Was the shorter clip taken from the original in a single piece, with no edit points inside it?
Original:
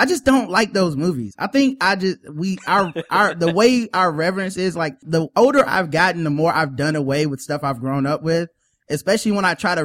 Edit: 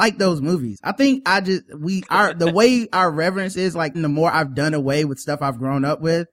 no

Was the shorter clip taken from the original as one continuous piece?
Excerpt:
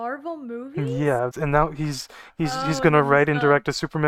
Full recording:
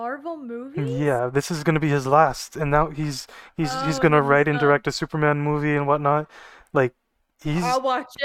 no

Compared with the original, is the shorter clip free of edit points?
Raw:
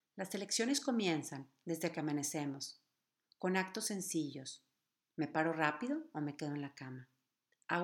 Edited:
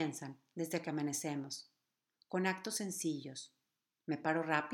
yes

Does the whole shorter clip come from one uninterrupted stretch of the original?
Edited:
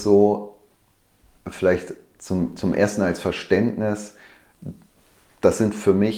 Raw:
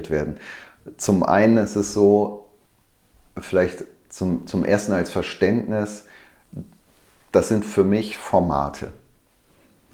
yes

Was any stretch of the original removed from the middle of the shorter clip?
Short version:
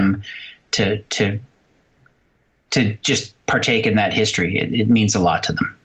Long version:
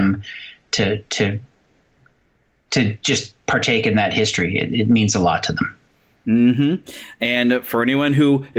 no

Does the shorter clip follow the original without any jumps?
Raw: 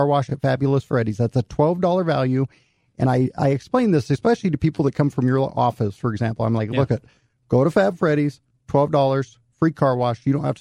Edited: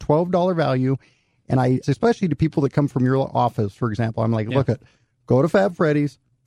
no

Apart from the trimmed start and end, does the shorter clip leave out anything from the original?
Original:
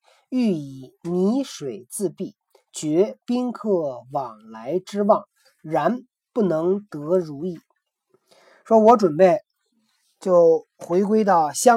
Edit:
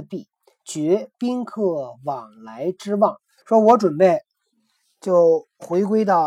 yes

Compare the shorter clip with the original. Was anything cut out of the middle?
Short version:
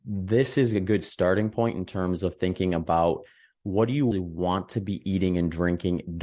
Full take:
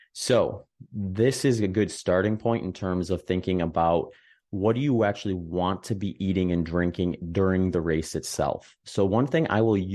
yes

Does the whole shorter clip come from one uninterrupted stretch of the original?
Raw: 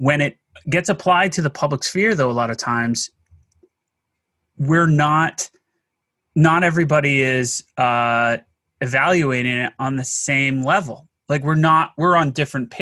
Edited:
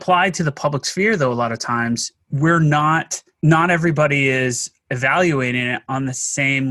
no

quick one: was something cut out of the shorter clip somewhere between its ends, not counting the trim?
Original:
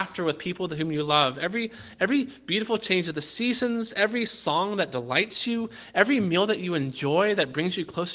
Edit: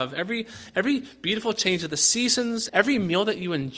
yes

